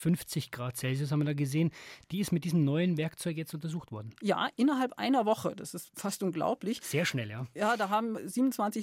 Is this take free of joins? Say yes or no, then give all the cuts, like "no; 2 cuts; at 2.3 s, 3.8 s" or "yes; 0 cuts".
yes; 0 cuts